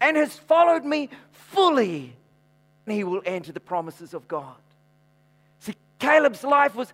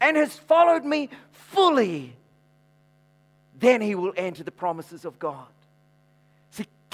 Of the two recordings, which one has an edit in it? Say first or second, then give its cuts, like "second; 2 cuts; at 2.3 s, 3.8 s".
first; 1 cut; at 2.9 s